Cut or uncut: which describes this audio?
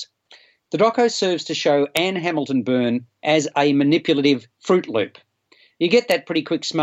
uncut